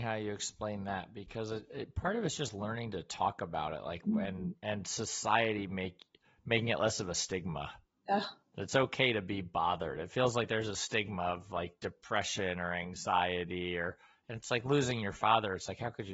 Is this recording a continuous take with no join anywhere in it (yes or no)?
yes